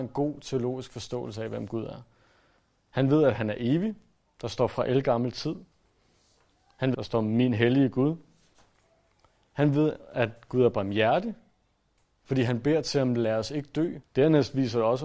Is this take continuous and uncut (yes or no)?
no